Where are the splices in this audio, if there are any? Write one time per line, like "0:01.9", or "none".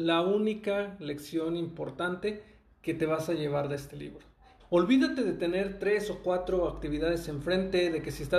0:04.6